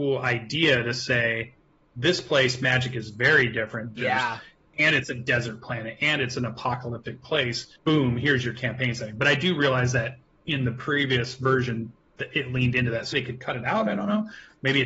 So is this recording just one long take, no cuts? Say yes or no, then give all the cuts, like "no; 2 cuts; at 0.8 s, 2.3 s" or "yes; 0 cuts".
no; 3 cuts; at 4.0 s, 7.8 s, 13.1 s